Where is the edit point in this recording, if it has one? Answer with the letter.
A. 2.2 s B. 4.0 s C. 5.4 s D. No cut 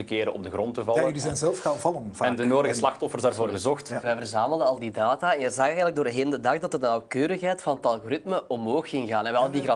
B